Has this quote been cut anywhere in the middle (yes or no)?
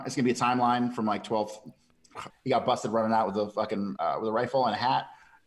yes